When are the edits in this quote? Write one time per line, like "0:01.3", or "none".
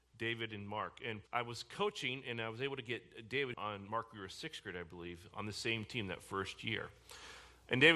0:01.3
0:03.5